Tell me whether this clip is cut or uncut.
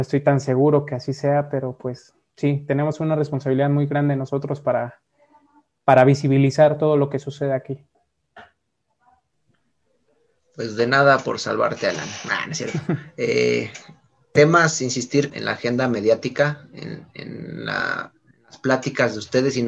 cut